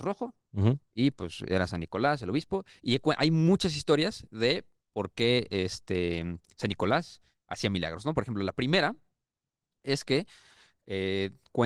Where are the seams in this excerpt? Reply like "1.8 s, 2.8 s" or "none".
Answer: none